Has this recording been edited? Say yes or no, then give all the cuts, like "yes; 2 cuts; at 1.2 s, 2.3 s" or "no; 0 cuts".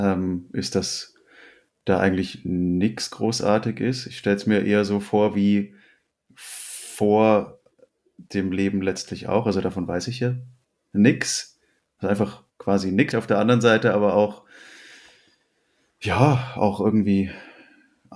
yes; 1 cut; at 13.1 s